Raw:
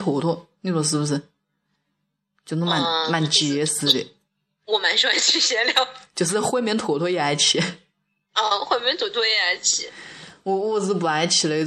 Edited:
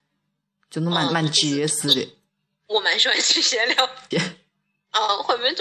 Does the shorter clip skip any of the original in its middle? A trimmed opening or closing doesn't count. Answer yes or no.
yes